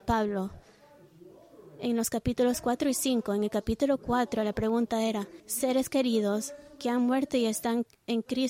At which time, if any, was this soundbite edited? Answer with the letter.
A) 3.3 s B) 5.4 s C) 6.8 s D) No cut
B